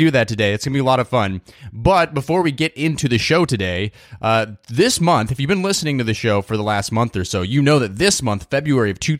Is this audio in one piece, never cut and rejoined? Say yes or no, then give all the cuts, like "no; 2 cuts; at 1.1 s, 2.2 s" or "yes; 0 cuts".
yes; 0 cuts